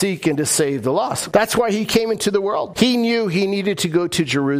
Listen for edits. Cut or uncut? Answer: cut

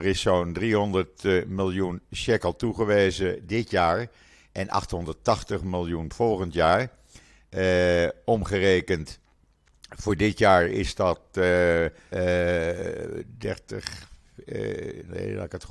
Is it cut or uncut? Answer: cut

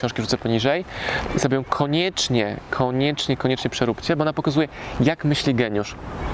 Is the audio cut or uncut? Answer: uncut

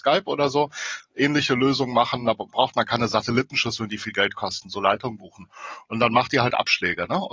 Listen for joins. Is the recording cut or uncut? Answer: uncut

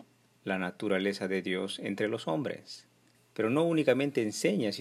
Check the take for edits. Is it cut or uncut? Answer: cut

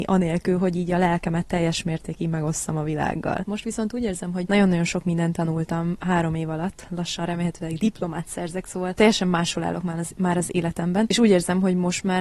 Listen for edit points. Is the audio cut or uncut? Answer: cut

